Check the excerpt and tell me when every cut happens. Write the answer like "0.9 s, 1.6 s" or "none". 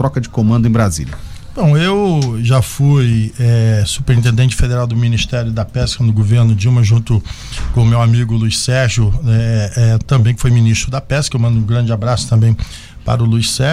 none

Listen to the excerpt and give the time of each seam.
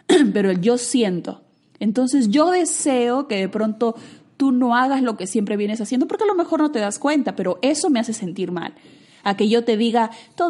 none

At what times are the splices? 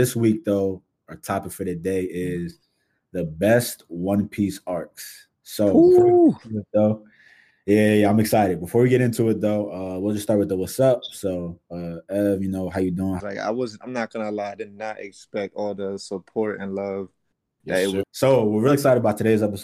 13.2 s, 18.0 s

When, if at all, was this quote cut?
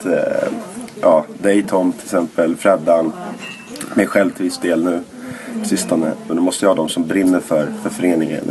6.3 s

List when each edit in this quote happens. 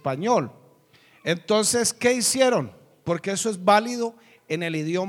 none

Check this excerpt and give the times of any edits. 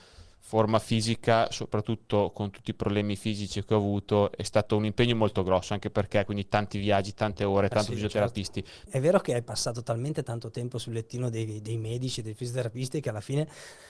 7.7 s, 8.9 s

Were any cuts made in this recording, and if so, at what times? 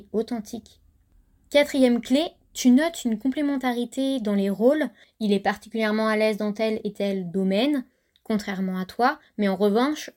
none

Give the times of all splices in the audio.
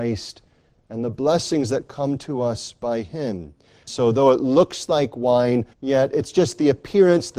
3.9 s, 5.7 s

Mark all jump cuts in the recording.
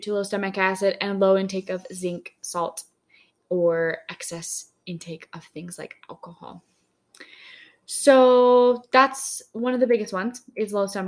none

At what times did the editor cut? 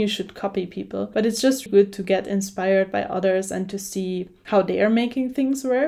1.7 s

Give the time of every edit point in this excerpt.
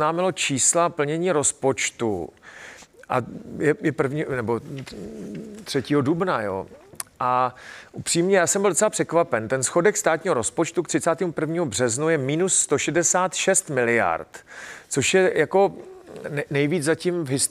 none

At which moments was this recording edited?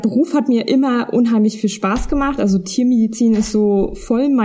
none

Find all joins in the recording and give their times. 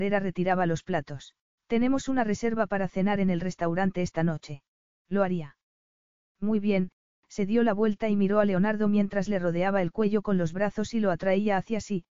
1.6 s, 5.0 s

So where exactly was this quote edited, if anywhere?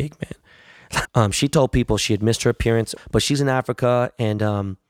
1.0 s, 3.0 s

